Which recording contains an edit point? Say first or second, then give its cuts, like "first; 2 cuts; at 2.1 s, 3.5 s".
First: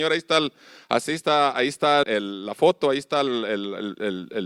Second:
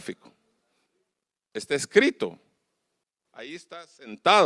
first; 1 cut; at 2.0 s